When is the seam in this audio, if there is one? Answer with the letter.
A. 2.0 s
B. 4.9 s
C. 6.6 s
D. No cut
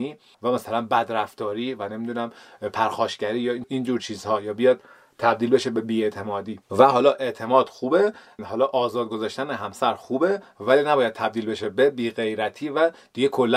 C